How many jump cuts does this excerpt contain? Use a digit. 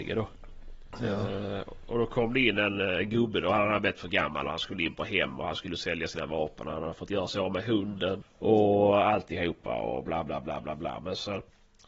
1